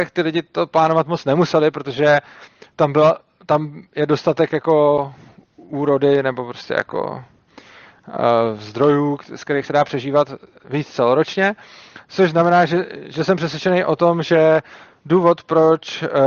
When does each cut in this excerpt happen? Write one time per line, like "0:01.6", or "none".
none

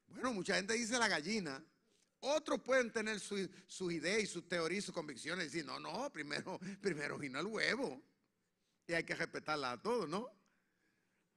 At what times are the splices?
none

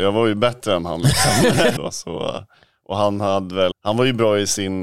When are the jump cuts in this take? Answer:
0:01.8
0:03.7

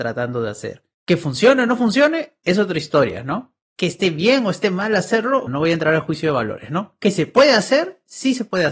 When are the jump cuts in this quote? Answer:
0:05.5

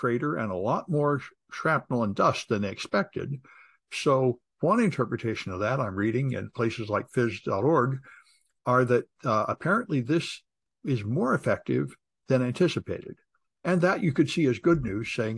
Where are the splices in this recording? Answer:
none

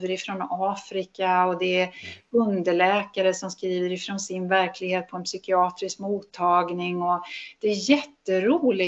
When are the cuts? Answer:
none

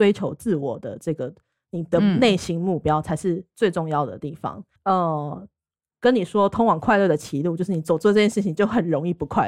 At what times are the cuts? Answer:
0:04.8

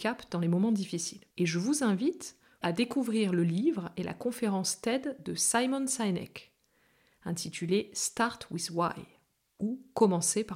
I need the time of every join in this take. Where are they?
0:01.3
0:02.6

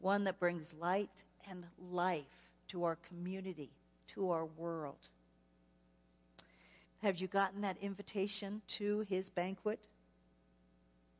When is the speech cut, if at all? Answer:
0:06.8
0:08.6

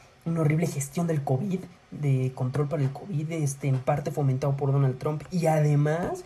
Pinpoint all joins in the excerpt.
none

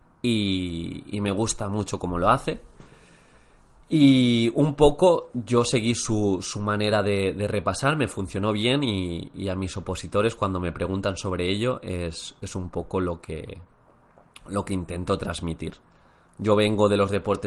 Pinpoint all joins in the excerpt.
none

